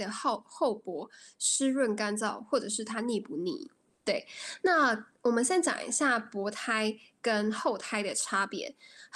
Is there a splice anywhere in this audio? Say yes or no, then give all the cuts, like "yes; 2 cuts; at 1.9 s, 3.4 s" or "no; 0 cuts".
yes; 1 cut; at 3.9 s